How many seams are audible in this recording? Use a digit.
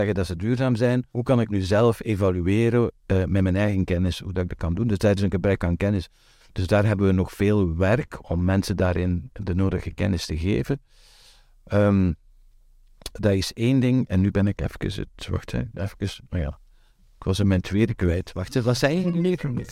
2